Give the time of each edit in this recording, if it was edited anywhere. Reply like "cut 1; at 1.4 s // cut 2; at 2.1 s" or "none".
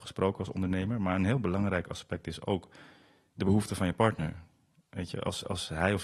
none